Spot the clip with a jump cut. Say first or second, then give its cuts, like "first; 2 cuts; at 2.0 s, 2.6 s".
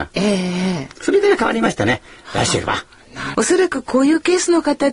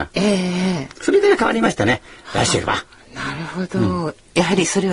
first; 1 cut; at 3.3 s